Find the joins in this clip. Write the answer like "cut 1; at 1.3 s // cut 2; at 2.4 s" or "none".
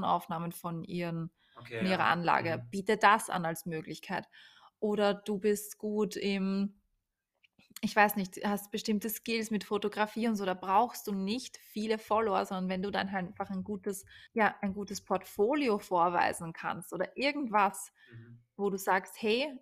cut 1; at 14.3 s